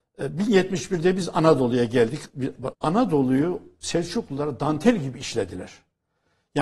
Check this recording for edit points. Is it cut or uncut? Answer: cut